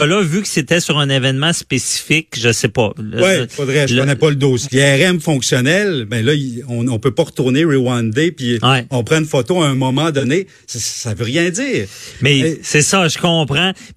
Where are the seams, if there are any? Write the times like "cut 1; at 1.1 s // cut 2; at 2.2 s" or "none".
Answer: cut 1; at 4.6 s